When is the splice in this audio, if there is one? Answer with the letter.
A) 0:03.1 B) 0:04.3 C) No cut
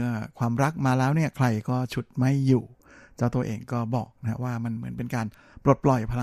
C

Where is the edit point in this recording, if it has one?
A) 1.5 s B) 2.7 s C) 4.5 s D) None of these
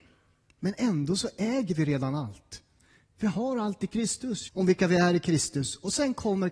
C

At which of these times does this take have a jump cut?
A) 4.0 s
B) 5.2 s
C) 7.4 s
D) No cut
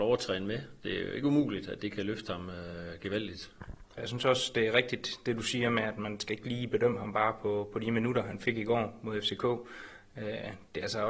A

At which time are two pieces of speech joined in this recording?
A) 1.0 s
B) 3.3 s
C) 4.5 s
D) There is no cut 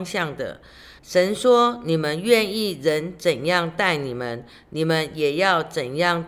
A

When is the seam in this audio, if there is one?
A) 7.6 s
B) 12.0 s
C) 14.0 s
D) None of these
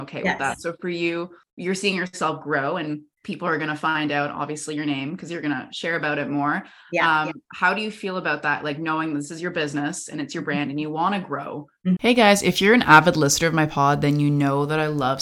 B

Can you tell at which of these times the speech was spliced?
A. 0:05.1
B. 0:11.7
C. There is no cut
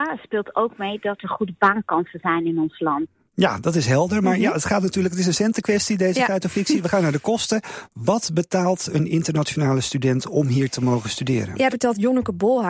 B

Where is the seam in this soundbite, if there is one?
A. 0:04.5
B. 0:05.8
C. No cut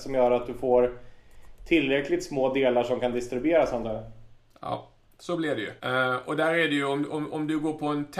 B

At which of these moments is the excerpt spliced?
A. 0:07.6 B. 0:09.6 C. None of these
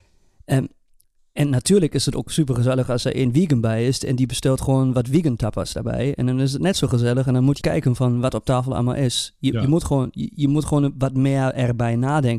A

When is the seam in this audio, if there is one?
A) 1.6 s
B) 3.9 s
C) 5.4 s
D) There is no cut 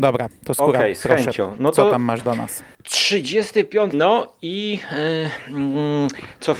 B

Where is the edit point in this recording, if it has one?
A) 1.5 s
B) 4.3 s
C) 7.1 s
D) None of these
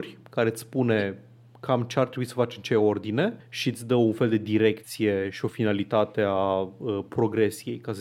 D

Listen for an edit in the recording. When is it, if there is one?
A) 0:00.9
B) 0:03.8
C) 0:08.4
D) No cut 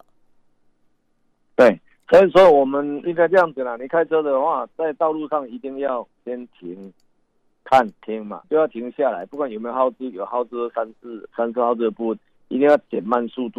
C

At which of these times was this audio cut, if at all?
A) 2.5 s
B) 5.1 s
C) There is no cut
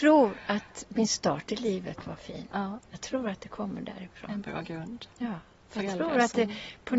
C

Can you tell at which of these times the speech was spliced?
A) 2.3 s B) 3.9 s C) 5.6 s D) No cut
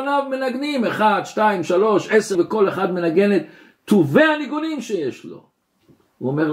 A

